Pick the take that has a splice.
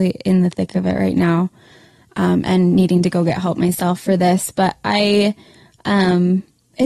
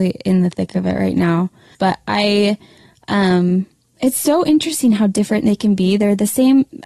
second; 1 cut; at 1.7 s

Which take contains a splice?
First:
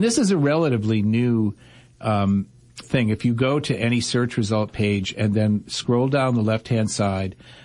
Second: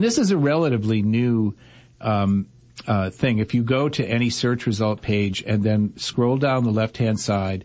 first; 1 cut; at 2.8 s

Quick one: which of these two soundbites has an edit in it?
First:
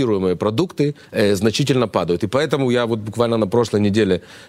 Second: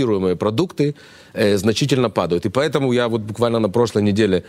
first; 1 cut; at 1.0 s

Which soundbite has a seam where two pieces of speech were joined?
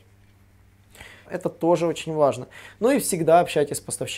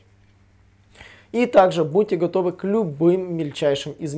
first; 1 cut; at 1.3 s

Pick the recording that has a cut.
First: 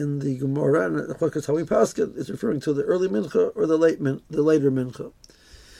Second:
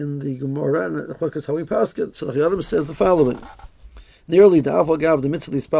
second; 1 cut; at 2.1 s

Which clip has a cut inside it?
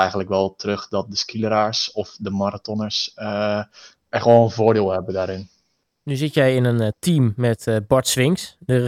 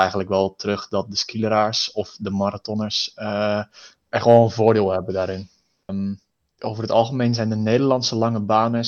second; 1 cut; at 5.9 s

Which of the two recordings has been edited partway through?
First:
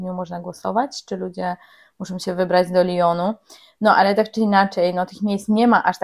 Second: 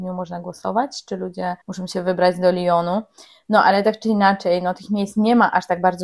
second; 1 cut; at 1.6 s

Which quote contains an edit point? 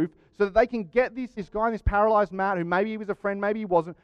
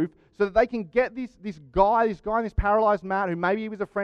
first; 1 cut; at 1.4 s

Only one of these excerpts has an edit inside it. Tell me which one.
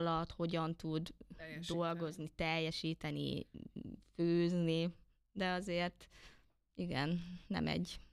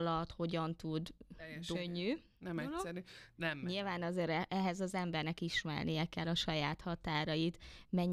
second; 2 cuts; at 1.7 s, 3.3 s

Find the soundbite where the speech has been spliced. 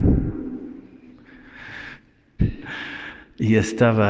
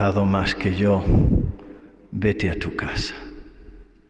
first; 1 cut; at 2.4 s

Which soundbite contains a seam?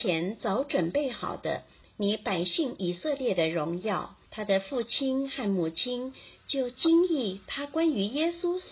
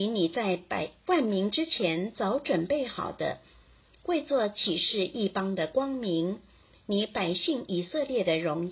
first; 2 cuts; at 1.8 s, 4.3 s

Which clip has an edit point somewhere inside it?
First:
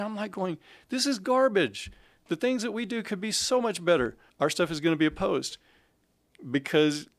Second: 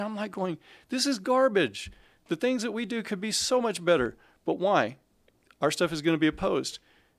first; 1 cut; at 4.3 s

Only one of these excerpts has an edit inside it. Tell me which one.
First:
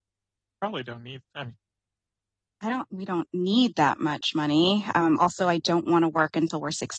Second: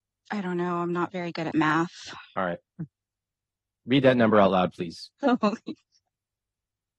first; 1 cut; at 2.9 s

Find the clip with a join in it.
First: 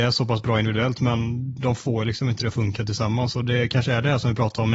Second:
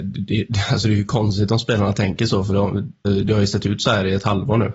second; 1 cut; at 3.0 s

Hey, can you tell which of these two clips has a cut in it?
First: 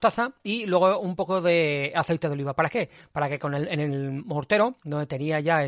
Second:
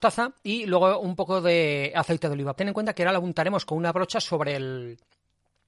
second; 1 cut; at 2.5 s

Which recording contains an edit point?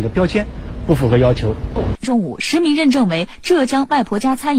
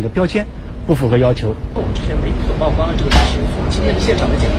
first; 1 cut; at 1.9 s

